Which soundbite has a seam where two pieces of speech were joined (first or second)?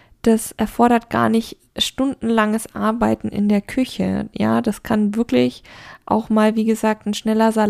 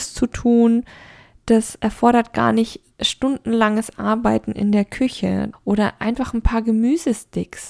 second